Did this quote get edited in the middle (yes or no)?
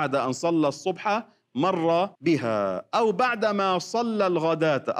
yes